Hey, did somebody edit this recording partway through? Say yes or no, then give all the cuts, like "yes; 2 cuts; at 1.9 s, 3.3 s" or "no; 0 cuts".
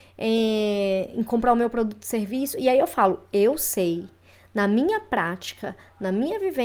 no; 0 cuts